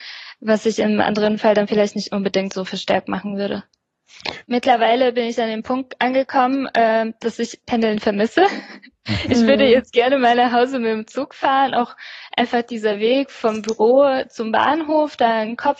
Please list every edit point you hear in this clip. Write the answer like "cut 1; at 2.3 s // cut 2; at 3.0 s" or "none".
cut 1; at 4.4 s